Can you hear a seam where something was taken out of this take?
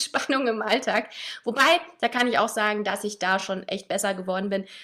no; 0 cuts

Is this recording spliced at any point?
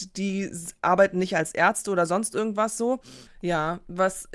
yes; 1 cut; at 3.3 s

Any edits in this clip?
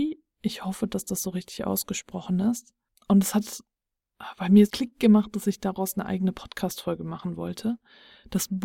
yes; 2 cuts; at 3.0 s, 4.7 s

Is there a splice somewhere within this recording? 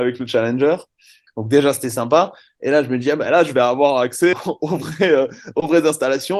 yes; 2 cuts; at 1.3 s, 4.3 s

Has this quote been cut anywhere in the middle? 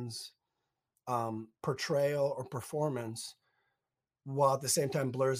no; 0 cuts

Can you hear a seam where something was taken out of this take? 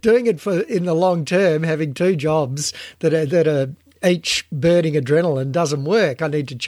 no; 0 cuts

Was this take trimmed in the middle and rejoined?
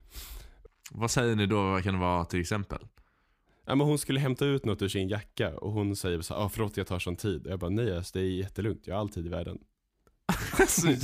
no; 0 cuts

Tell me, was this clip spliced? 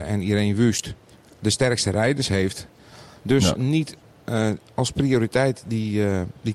yes; 1 cut; at 3.2 s

